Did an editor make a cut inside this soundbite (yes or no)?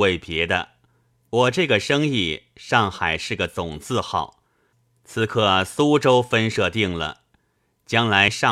no